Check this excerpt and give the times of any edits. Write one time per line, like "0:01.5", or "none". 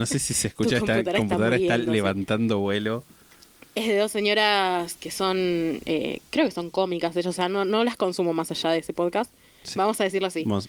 0:09.7